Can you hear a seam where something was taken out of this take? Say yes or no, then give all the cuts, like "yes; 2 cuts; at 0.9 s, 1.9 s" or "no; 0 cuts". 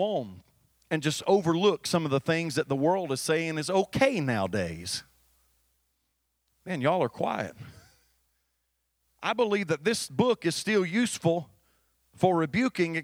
no; 0 cuts